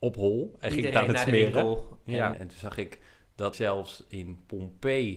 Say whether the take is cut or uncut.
cut